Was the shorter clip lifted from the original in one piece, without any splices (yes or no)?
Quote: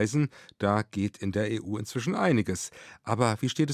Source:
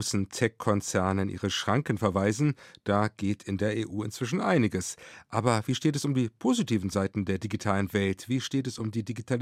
yes